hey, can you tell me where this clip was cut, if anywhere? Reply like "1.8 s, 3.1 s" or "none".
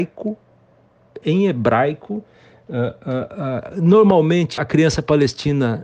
4.6 s